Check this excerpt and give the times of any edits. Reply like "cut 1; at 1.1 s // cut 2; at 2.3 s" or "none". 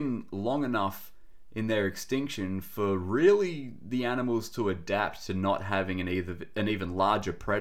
none